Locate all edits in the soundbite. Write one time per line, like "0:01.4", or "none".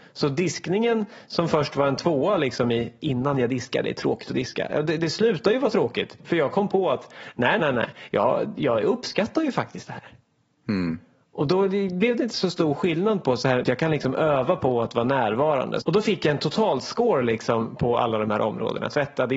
0:07.6
0:13.6
0:15.8